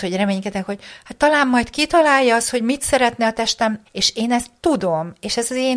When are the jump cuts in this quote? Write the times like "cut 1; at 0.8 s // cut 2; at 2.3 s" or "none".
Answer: cut 1; at 3.9 s